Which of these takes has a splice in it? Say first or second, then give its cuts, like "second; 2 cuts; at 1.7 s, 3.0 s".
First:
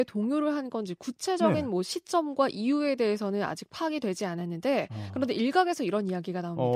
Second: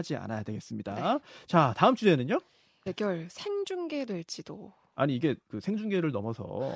second; 1 cut; at 2.9 s